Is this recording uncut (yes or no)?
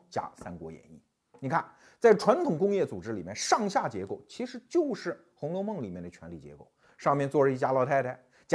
yes